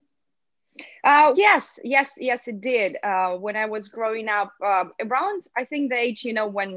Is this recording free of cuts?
no; 1 cut; at 1.3 s

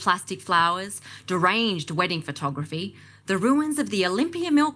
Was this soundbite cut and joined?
no; 0 cuts

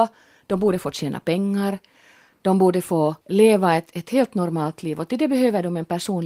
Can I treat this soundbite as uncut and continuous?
no; 1 cut; at 3.2 s

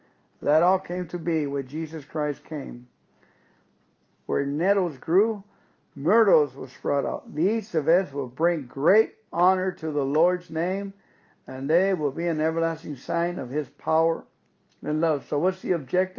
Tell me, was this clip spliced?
yes; 1 cut; at 4.1 s

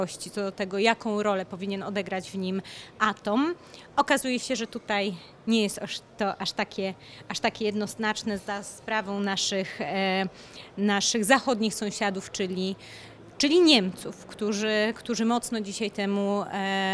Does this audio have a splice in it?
no; 0 cuts

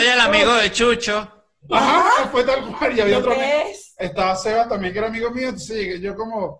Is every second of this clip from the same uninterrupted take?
yes; 0 cuts

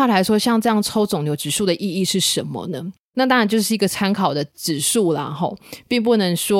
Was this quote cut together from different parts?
yes; 1 cut; at 3.0 s

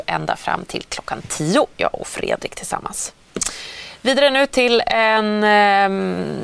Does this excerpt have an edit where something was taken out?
no; 0 cuts

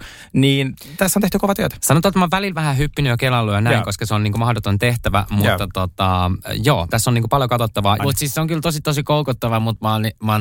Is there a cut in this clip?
yes; 2 cuts; at 6.9 s, 8.0 s

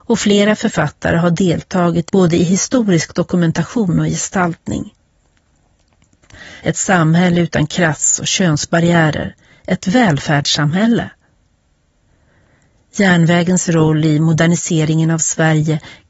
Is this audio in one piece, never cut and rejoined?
no; 1 cut; at 6.6 s

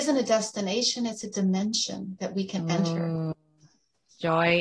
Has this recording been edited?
no; 0 cuts

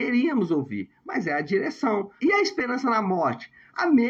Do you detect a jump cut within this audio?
yes; 1 cut; at 2.2 s

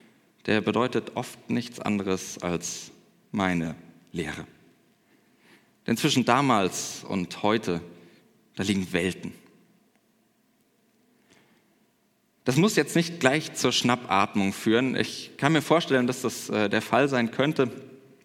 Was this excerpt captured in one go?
yes; 0 cuts

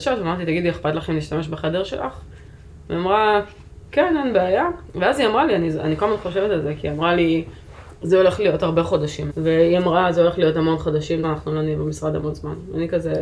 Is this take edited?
yes; 2 cuts; at 9.3 s, 11.2 s

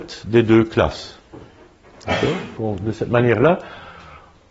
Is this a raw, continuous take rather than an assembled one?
no; 1 cut; at 2.6 s

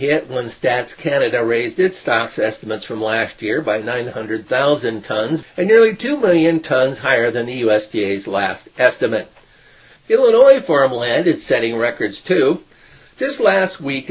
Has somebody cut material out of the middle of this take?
yes; 1 cut; at 5.4 s

